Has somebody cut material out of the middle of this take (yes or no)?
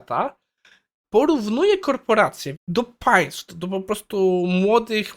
yes